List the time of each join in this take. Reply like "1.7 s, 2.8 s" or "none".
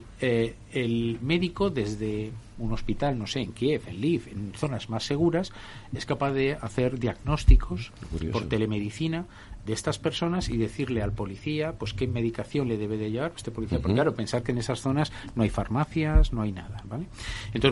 9.7 s